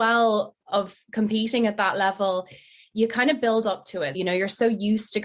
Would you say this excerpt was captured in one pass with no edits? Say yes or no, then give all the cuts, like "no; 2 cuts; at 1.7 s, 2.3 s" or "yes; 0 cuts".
no; 1 cut; at 4.1 s